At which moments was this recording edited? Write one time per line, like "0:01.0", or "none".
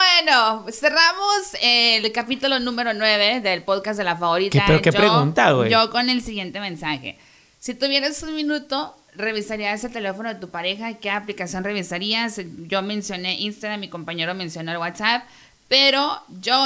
none